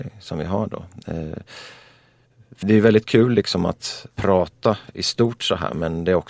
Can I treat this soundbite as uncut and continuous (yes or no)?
no